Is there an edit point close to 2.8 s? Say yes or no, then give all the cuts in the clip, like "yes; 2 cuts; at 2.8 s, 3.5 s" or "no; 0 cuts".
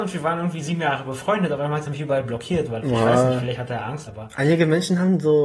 yes; 2 cuts; at 2.8 s, 4.1 s